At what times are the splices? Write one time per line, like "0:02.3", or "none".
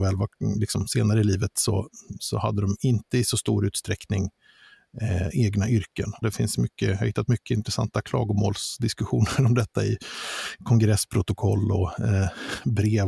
0:06.2